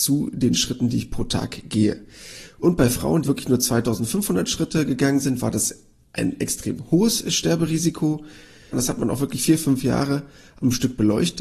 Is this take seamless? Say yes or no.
no